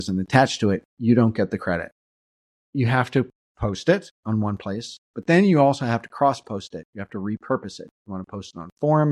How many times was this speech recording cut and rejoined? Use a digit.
1